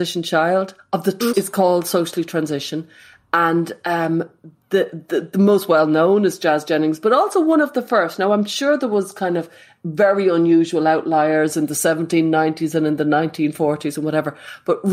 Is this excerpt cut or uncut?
cut